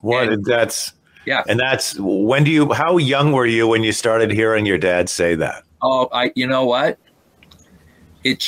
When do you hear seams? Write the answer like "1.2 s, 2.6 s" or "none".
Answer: none